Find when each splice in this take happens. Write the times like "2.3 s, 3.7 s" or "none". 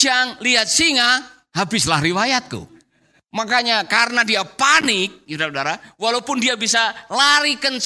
none